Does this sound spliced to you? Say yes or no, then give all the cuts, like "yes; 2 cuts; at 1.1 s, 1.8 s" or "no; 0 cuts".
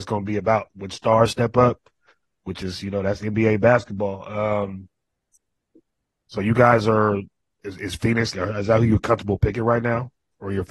yes; 1 cut; at 8.3 s